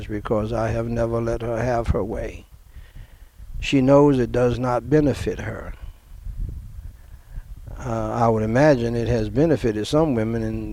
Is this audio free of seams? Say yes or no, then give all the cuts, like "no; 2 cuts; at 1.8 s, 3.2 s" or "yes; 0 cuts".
yes; 0 cuts